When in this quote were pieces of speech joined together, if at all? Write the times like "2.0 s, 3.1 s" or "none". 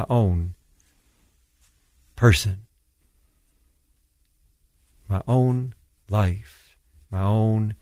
none